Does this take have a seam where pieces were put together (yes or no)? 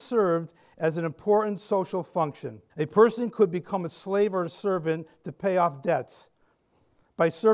yes